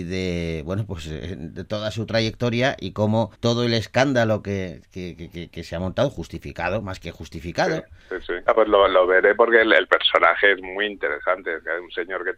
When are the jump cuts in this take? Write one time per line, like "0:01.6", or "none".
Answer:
0:03.3
0:08.5